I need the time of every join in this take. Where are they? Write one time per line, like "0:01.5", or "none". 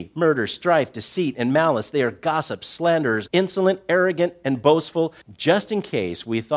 0:03.3
0:05.2